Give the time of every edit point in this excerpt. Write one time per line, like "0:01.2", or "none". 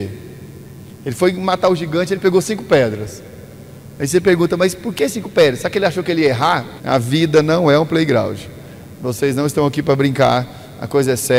0:06.8